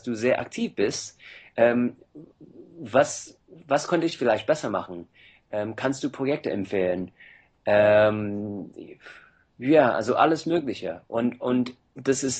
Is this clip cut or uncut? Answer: uncut